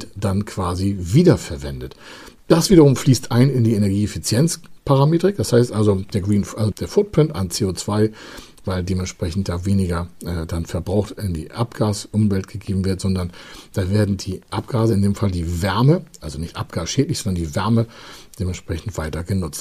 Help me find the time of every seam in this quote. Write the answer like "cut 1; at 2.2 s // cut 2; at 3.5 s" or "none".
cut 1; at 6.7 s